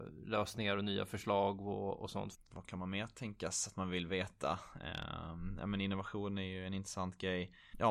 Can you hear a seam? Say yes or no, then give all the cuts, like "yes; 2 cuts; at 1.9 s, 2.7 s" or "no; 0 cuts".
yes; 1 cut; at 2.3 s